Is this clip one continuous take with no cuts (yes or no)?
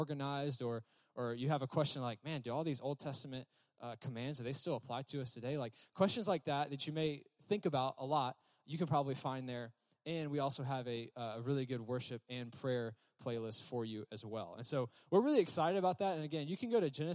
yes